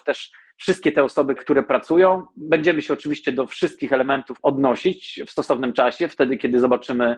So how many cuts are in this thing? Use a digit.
2